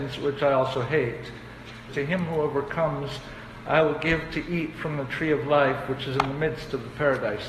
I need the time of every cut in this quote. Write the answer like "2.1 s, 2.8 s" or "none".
1.9 s